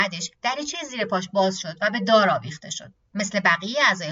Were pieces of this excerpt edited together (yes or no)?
yes